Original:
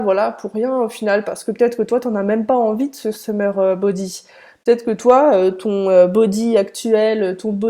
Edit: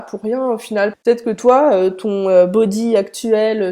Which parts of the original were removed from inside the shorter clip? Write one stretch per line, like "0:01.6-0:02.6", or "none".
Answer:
0:01.2-0:04.5